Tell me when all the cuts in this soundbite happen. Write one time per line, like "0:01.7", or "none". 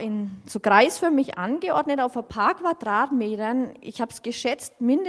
none